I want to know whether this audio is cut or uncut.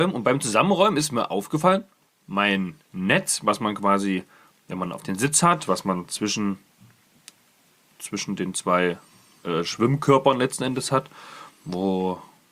cut